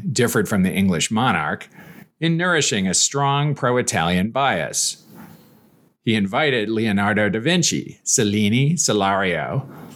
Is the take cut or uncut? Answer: uncut